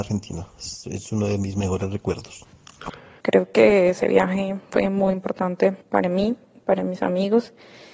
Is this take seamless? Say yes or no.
no